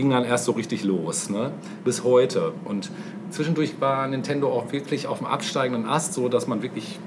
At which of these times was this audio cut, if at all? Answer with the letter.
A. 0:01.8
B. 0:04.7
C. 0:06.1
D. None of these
D